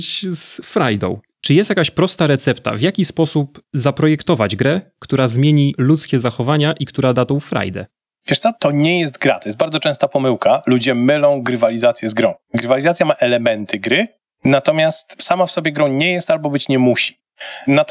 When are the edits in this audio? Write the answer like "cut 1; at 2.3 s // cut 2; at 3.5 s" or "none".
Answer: none